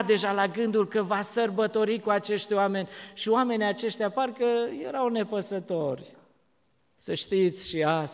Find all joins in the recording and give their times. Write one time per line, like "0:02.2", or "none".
0:07.0